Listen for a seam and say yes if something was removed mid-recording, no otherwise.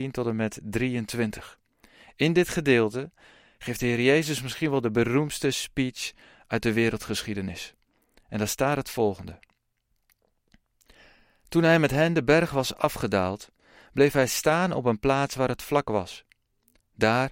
no